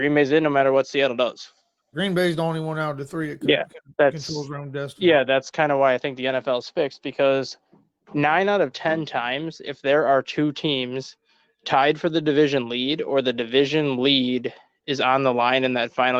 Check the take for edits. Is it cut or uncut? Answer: cut